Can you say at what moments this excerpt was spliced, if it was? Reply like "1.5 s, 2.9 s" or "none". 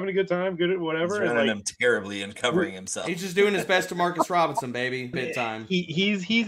5.1 s